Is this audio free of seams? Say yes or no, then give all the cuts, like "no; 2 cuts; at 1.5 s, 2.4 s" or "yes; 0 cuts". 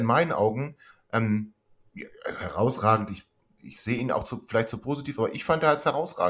yes; 0 cuts